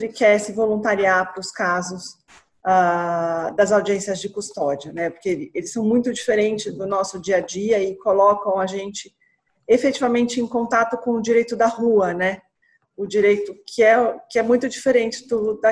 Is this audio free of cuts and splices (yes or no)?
yes